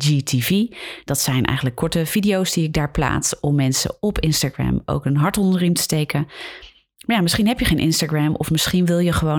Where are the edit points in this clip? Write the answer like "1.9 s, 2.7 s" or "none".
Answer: none